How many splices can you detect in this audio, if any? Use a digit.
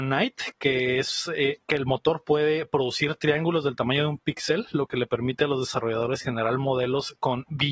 0